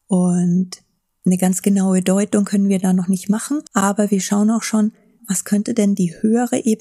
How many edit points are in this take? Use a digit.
2